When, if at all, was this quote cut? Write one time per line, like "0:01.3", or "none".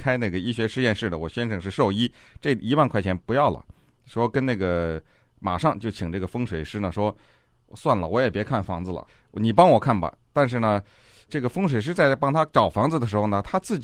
none